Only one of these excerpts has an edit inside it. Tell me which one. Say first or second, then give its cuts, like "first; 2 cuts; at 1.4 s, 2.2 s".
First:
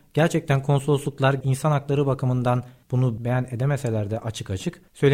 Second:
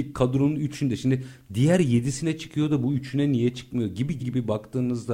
second; 1 cut; at 4.2 s